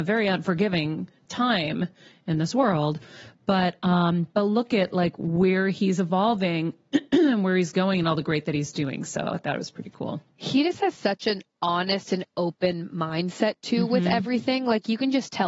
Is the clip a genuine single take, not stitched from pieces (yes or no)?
yes